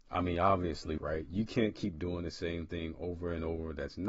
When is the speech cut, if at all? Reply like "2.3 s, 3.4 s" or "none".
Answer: 1.0 s